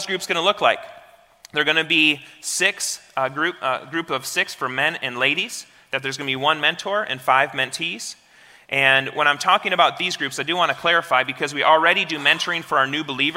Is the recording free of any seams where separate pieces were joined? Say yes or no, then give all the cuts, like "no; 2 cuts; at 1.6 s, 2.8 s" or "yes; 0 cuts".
yes; 0 cuts